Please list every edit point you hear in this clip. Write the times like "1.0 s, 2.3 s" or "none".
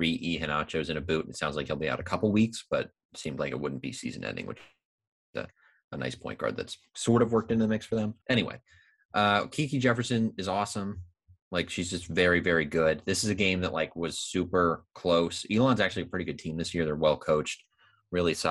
8.2 s